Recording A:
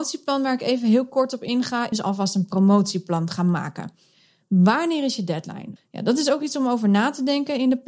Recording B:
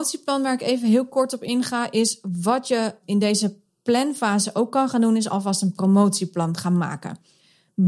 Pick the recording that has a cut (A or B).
A